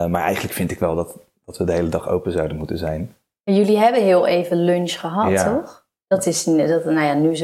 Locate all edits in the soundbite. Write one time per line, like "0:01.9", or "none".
none